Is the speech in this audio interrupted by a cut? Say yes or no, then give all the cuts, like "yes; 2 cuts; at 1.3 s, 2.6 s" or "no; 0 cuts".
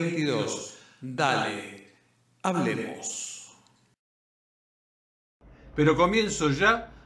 yes; 1 cut; at 5.7 s